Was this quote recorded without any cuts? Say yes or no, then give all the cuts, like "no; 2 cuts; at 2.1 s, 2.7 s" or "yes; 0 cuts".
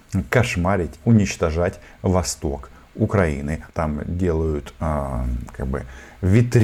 no; 2 cuts; at 1.0 s, 3.7 s